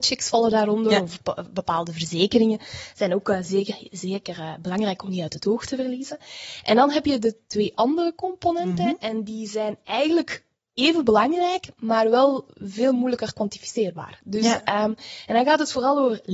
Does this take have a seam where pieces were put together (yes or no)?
no